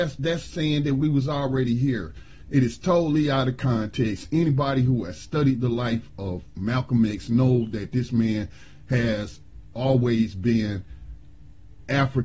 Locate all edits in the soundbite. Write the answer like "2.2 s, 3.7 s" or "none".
none